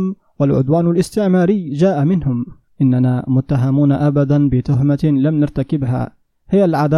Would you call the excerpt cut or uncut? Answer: cut